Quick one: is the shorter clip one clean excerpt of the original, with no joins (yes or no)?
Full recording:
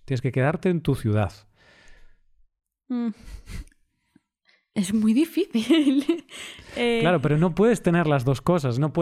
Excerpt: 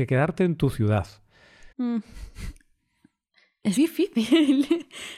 no